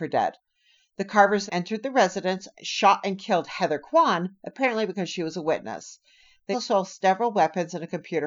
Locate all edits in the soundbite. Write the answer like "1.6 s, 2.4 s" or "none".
1.5 s, 6.5 s